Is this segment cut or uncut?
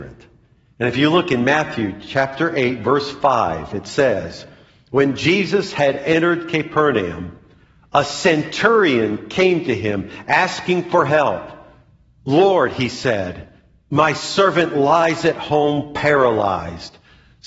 uncut